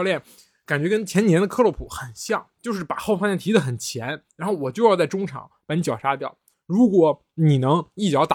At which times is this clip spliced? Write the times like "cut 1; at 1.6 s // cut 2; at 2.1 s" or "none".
none